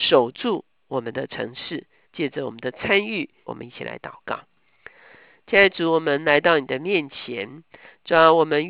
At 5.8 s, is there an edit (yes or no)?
no